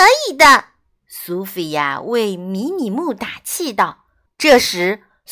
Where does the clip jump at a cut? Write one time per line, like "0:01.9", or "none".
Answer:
0:04.3